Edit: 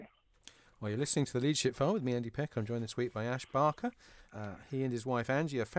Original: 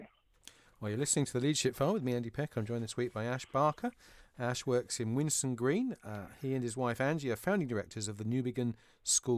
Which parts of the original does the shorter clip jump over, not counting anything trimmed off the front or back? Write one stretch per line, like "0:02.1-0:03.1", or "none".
0:04.3-0:06.0